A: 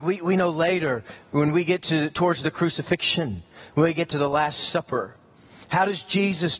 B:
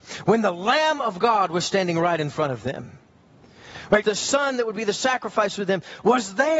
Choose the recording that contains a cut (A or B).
B